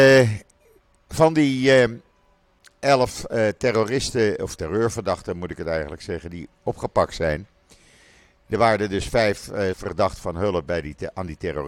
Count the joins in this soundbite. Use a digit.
1